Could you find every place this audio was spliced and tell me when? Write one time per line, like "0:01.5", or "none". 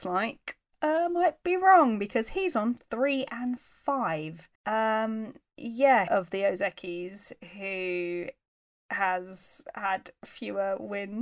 0:04.5
0:06.1